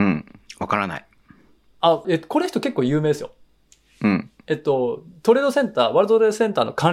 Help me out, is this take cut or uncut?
cut